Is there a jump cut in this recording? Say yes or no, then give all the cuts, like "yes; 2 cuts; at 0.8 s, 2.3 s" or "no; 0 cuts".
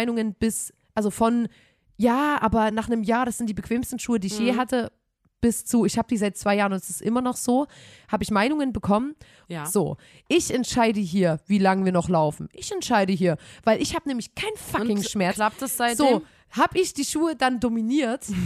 yes; 1 cut; at 9.4 s